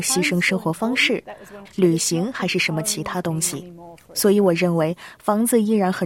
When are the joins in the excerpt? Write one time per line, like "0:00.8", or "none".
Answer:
0:01.7